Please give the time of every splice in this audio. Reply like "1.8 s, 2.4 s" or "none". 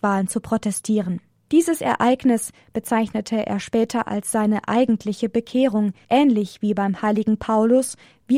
1.5 s, 6.0 s